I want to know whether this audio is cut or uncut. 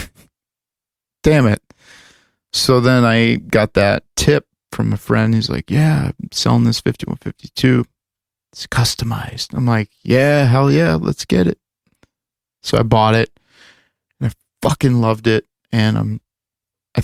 uncut